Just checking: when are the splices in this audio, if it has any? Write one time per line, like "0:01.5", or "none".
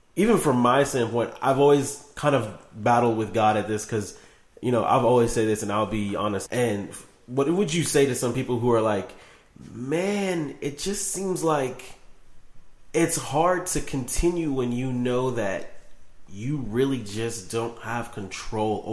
0:06.5